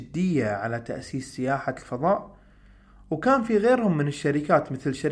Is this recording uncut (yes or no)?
yes